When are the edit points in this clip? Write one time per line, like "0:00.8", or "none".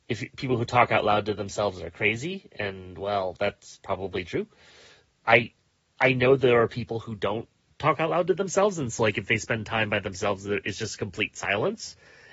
none